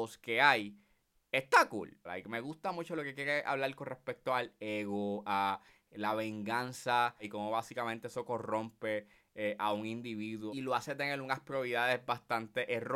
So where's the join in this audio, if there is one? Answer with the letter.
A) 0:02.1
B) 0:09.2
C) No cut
A